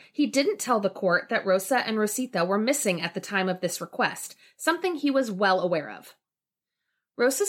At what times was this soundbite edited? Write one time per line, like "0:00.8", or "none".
none